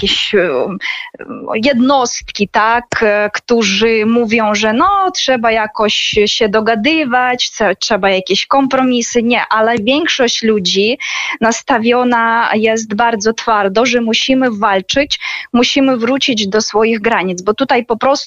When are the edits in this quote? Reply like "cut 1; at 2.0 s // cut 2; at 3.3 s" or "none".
none